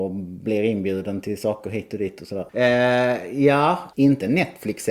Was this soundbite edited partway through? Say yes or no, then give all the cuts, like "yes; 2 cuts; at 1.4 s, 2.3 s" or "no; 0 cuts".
yes; 2 cuts; at 2.5 s, 3.9 s